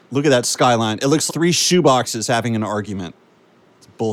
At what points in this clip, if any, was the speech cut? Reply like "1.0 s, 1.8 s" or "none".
1.3 s

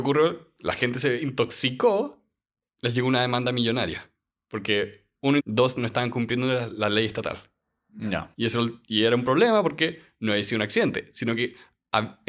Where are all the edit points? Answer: 5.4 s, 8.3 s

